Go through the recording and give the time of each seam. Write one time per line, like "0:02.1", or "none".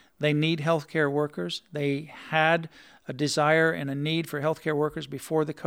none